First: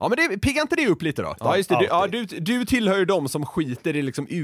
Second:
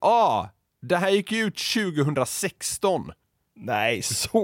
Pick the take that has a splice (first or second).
first